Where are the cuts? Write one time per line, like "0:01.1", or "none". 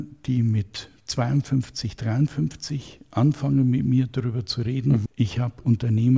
0:05.1